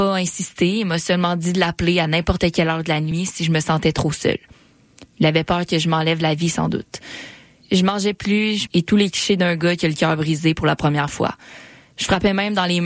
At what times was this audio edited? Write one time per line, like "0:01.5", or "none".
0:07.6
0:08.7